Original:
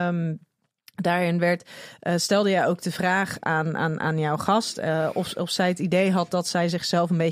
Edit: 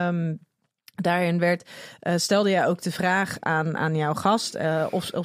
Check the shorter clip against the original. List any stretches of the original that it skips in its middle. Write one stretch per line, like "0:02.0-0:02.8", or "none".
0:03.8-0:04.0

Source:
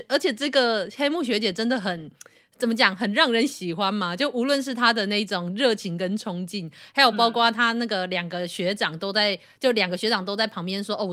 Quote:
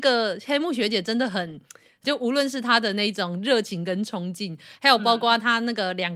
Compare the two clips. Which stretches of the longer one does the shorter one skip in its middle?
0:02.5-0:04.2

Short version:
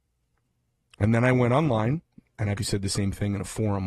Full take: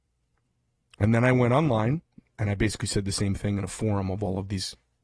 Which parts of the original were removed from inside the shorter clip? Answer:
0:02.6-0:02.8

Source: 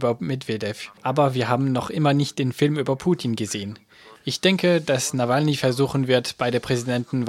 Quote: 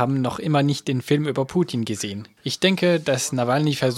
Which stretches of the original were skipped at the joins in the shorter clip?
0:03.9-0:04.2

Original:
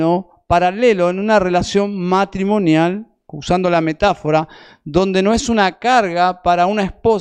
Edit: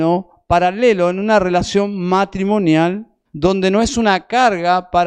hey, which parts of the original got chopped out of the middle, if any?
0:03.3-0:04.8

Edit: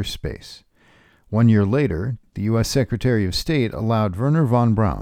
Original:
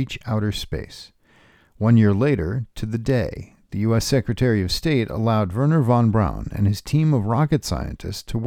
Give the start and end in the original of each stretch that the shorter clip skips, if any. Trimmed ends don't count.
0:02.7-0:03.6

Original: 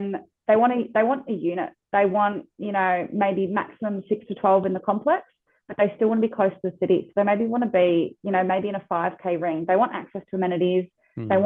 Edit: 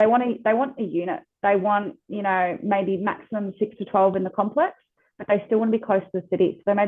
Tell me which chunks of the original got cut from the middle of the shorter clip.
none

